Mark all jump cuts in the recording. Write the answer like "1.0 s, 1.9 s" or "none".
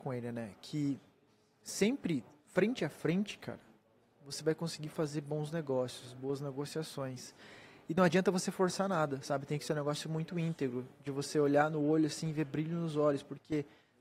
none

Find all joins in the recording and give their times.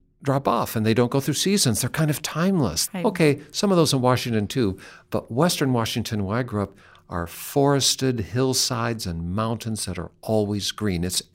2.9 s

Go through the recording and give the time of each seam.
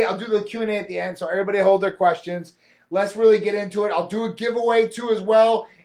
none

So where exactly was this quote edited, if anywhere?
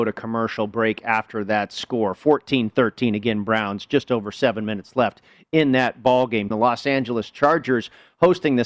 6.5 s

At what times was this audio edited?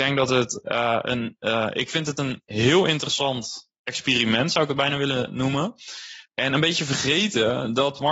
6.3 s

